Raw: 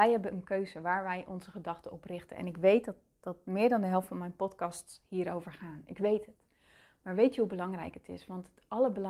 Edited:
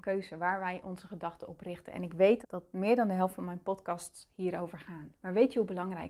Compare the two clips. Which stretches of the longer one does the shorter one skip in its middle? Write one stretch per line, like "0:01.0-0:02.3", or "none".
0:02.8-0:03.1
0:05.8-0:06.9